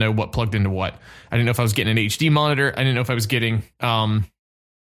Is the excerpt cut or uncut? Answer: cut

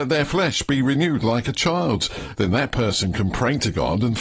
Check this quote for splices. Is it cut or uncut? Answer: cut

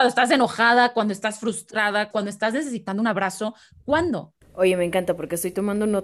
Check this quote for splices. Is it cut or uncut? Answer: cut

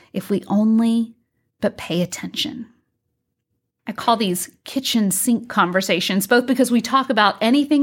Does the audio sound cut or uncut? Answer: cut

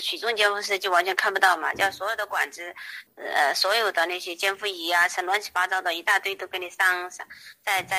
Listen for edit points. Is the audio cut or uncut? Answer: cut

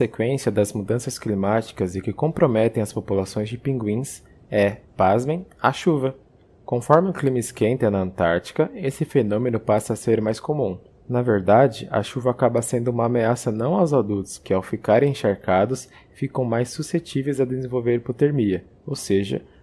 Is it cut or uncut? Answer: cut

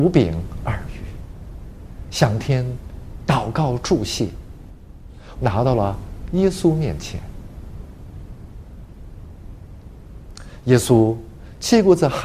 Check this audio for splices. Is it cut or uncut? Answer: cut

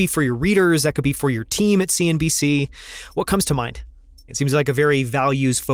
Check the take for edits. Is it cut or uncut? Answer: cut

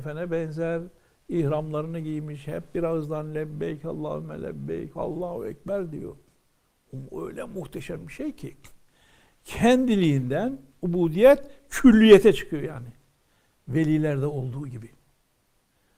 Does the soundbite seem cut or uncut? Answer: uncut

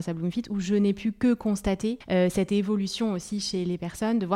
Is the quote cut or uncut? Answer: uncut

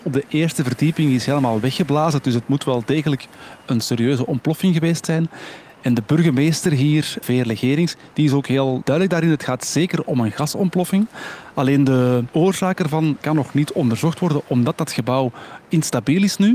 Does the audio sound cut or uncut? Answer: uncut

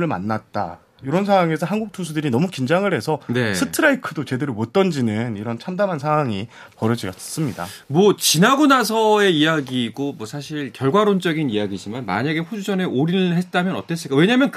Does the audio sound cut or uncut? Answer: uncut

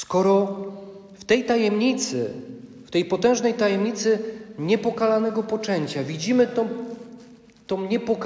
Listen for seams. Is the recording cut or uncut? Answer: uncut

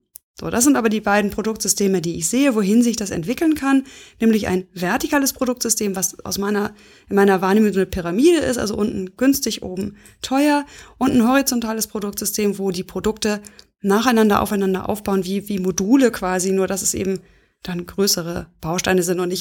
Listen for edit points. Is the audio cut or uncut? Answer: uncut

